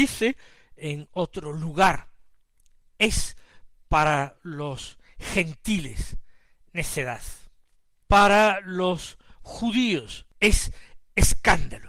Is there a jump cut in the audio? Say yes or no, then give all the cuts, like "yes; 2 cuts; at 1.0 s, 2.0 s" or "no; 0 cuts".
no; 0 cuts